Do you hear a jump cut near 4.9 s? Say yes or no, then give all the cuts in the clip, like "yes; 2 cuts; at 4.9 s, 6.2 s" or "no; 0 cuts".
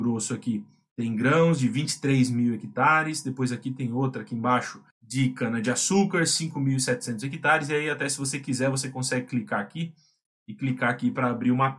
yes; 1 cut; at 4.9 s